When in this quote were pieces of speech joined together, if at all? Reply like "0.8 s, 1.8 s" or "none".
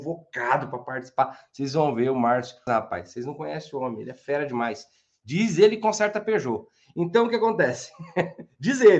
2.7 s